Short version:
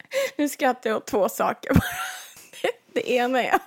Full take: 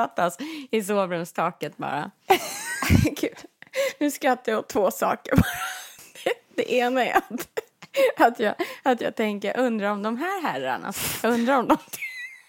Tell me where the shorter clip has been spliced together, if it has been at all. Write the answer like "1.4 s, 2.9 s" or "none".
none